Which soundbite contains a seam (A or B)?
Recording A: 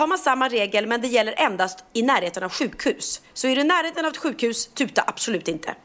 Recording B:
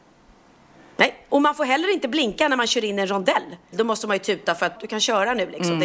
B